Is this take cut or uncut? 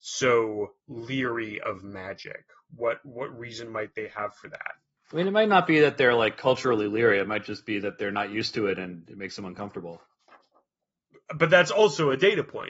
uncut